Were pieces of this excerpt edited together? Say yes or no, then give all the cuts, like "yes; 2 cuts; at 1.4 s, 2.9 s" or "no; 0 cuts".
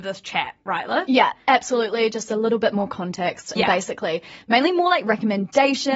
yes; 1 cut; at 3.5 s